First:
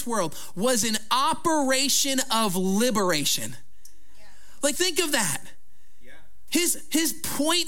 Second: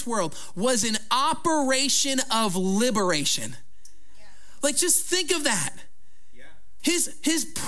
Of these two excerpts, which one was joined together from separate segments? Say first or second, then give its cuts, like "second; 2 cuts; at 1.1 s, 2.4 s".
first; 1 cut; at 4.7 s